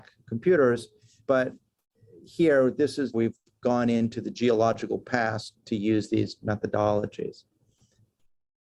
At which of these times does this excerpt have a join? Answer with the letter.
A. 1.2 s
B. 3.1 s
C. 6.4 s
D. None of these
B